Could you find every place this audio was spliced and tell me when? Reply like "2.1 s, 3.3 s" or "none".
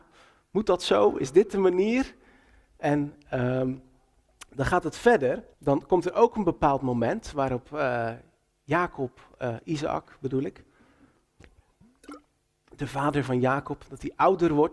5.5 s